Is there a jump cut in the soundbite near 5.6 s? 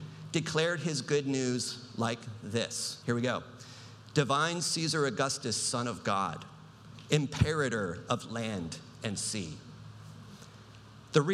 no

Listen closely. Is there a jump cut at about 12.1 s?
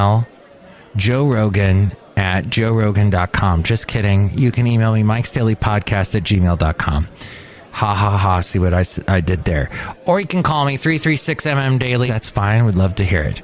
yes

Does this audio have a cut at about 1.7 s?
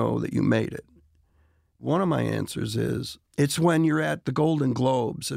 no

